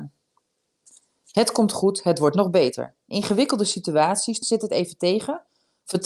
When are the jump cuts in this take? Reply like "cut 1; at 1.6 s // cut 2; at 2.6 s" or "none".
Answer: cut 1; at 4.4 s